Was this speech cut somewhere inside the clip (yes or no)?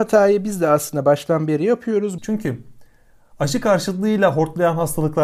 yes